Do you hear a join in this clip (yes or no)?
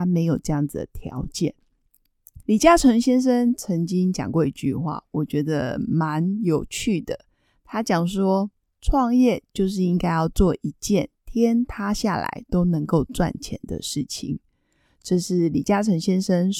yes